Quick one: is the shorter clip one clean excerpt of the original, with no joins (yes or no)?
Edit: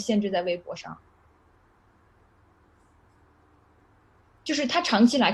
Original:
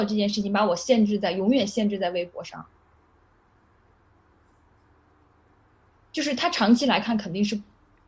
yes